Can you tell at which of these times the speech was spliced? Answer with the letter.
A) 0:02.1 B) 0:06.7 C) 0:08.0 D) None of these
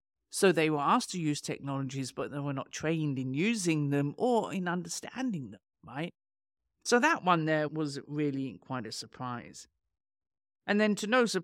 B